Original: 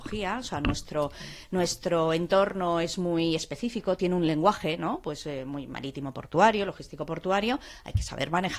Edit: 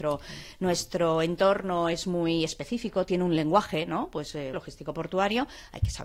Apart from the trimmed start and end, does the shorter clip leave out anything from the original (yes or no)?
yes